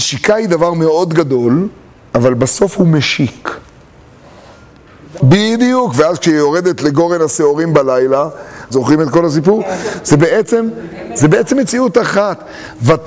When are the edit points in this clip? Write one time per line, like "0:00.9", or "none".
0:05.2
0:08.7